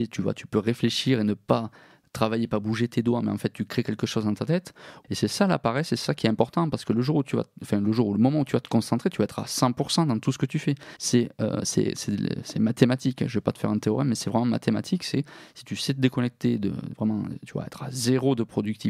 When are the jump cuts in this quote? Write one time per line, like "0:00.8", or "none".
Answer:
0:05.0
0:11.0